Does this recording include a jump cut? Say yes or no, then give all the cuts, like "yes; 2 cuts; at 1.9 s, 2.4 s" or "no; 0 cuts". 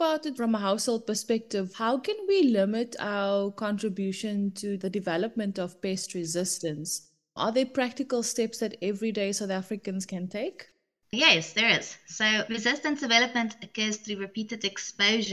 no; 0 cuts